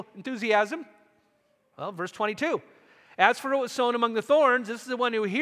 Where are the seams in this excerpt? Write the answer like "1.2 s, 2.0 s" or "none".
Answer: 1.7 s